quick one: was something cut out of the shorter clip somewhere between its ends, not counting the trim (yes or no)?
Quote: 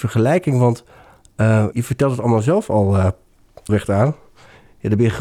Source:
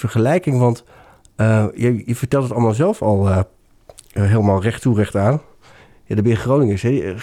yes